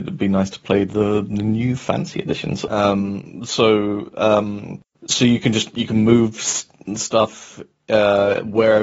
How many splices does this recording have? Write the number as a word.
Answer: one